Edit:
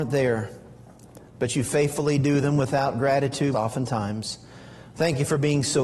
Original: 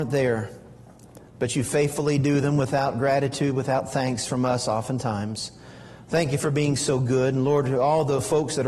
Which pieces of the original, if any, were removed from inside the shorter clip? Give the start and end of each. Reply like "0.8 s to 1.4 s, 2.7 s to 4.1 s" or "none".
3.5 s to 4.7 s